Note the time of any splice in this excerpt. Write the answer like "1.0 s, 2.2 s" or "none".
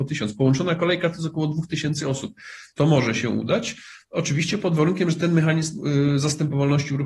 2.7 s